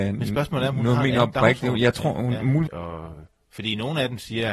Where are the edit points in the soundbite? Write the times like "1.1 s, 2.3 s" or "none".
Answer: 2.7 s